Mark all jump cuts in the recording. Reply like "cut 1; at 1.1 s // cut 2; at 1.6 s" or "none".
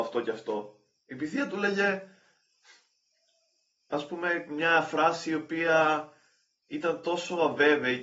none